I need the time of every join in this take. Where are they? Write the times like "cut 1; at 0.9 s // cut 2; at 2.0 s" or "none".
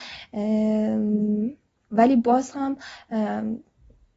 none